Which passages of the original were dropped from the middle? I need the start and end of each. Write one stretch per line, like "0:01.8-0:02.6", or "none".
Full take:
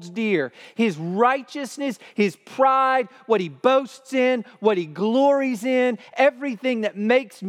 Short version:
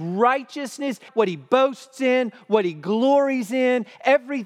0:02.1-0:03.2